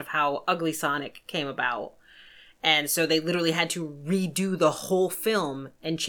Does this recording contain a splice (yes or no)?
no